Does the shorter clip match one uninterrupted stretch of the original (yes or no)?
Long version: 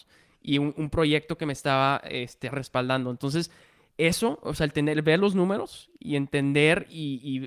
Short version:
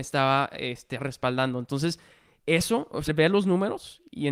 no